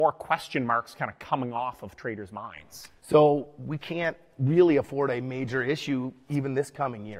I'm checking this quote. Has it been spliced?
yes; 1 cut; at 3.0 s

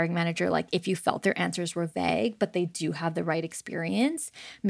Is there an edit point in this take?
no; 0 cuts

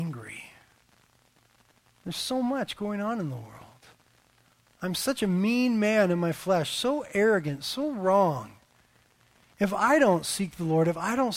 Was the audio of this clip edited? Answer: no; 0 cuts

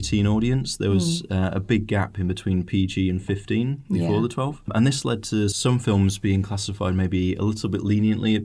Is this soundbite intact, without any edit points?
yes; 0 cuts

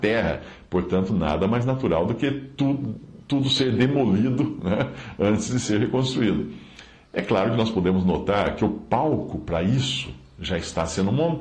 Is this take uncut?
yes; 0 cuts

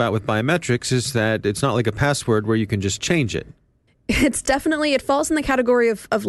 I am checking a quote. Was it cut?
no; 0 cuts

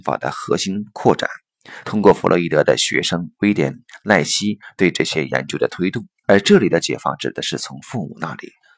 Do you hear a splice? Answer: yes; 2 cuts; at 1.8 s, 6.2 s

